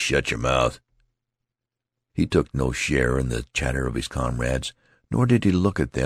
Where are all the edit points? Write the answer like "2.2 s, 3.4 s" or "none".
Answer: 2.1 s